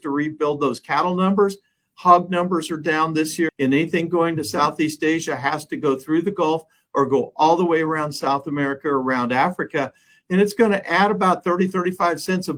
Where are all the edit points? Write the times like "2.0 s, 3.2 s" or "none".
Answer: 3.5 s